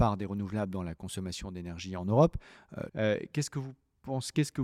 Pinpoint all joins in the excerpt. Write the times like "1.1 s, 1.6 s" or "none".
2.9 s